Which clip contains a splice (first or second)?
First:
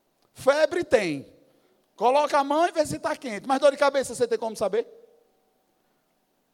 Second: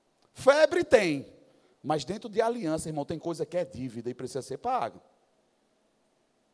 second